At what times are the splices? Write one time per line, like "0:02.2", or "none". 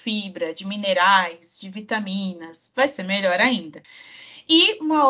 none